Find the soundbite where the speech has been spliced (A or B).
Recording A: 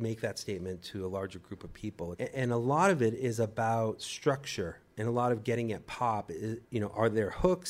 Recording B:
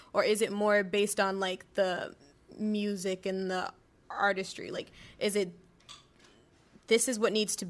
A